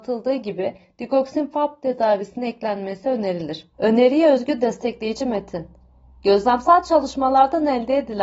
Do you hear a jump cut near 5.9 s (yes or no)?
no